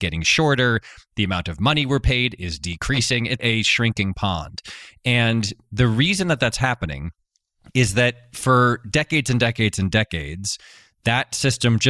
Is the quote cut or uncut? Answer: cut